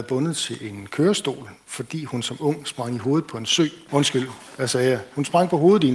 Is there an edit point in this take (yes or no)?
yes